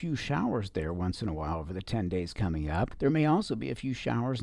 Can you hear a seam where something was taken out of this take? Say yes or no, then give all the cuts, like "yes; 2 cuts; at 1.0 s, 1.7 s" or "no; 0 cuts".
no; 0 cuts